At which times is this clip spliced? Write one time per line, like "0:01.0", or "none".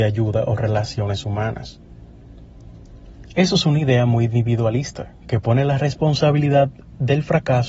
0:03.3